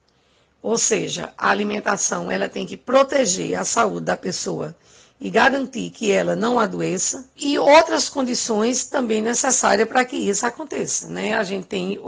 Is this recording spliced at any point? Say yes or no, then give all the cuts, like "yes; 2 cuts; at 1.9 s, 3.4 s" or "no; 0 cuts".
yes; 1 cut; at 7.4 s